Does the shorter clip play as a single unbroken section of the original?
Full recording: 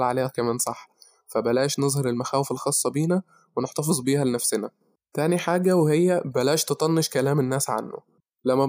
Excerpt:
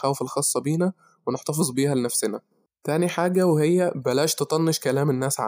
yes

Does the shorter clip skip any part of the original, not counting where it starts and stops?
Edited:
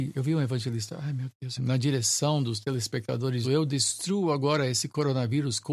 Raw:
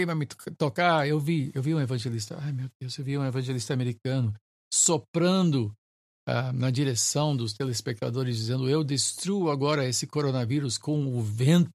yes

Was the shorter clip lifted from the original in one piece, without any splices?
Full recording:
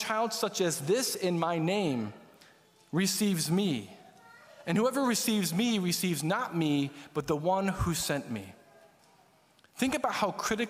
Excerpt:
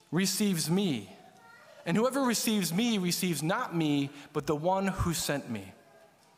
yes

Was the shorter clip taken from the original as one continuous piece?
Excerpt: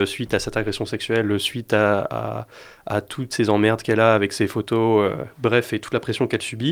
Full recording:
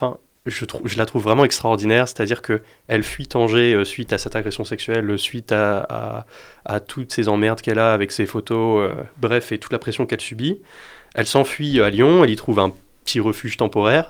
yes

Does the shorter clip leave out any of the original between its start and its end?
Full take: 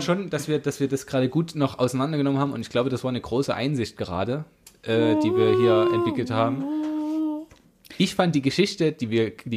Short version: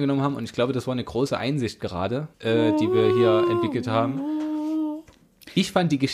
yes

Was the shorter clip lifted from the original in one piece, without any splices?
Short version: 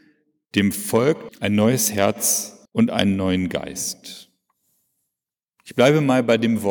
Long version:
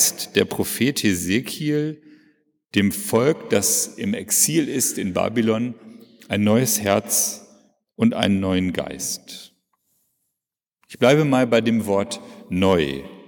no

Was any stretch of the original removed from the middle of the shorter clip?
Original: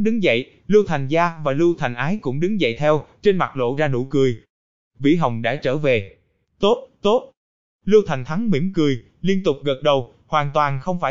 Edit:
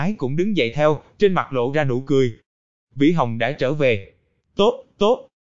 no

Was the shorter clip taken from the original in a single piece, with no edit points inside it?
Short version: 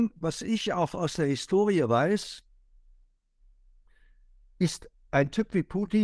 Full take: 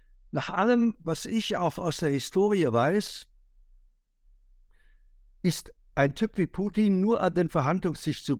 yes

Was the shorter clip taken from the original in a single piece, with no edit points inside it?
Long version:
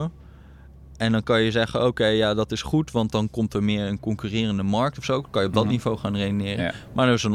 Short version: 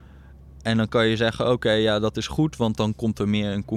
yes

